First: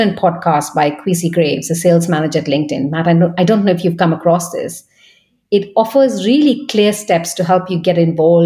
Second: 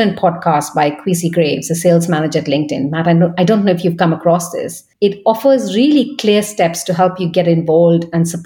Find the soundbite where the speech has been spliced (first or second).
second